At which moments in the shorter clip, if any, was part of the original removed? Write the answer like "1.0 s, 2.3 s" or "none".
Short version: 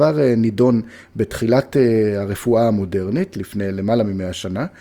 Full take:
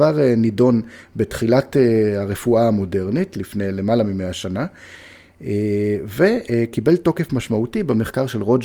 none